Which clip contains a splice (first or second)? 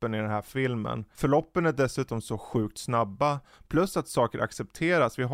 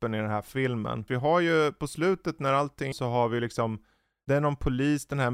second